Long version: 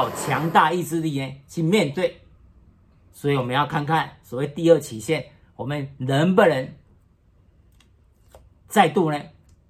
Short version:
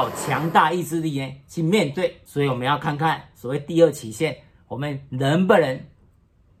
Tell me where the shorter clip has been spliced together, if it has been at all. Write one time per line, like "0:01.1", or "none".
0:02.3